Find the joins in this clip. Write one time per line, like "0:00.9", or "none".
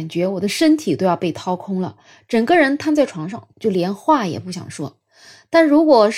0:03.5